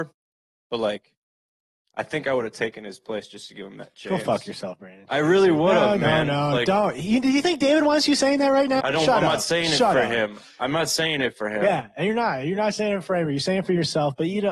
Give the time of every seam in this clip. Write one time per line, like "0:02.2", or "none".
0:08.8